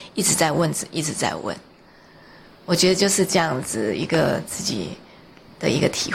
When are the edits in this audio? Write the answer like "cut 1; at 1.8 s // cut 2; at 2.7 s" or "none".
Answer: none